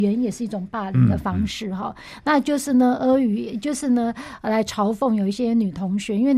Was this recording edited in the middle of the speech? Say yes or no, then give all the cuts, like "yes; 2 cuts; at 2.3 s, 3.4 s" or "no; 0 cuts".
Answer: no; 0 cuts